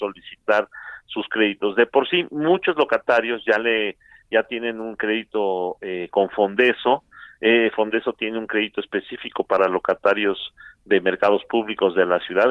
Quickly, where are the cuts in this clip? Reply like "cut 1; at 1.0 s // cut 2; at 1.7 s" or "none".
none